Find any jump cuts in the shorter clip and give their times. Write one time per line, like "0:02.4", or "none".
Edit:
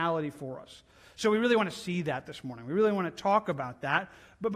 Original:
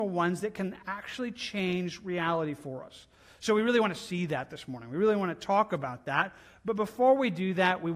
none

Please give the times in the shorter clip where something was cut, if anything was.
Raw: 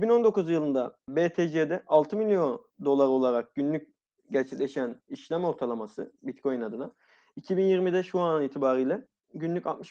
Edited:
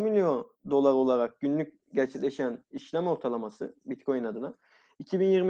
0:01.8

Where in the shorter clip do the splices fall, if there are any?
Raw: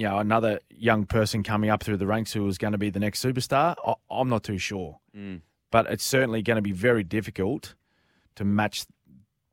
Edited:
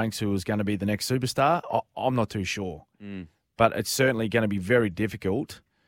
none

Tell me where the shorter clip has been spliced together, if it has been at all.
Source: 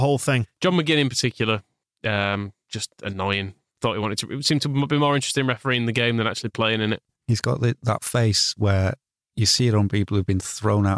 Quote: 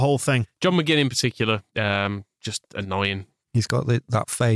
0:01.7
0:03.4

